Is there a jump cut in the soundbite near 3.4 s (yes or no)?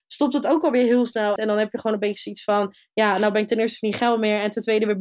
no